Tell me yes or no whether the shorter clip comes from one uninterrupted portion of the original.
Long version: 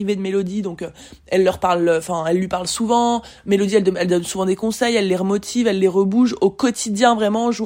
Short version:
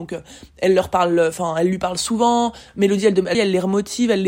no